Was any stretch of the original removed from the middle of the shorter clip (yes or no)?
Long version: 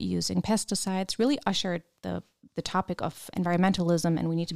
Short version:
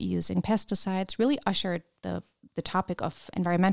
no